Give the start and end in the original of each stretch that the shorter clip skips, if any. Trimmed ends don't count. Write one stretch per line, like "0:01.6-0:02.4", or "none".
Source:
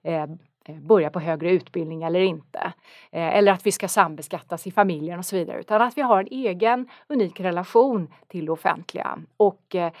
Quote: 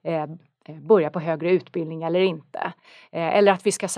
none